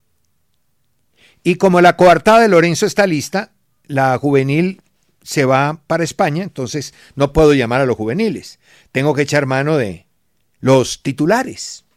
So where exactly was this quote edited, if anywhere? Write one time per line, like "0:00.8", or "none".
none